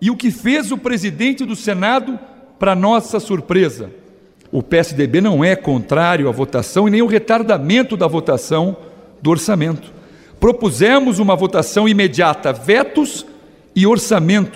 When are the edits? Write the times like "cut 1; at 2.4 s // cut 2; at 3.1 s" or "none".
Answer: cut 1; at 4.5 s